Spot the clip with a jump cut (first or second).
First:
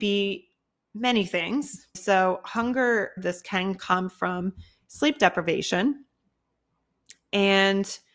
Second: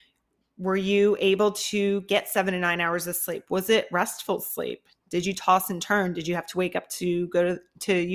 first